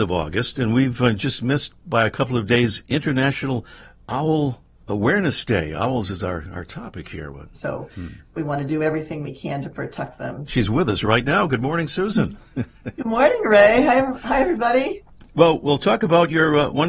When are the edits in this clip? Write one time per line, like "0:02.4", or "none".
0:07.5
0:10.5